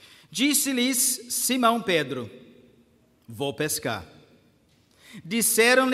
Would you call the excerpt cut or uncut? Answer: uncut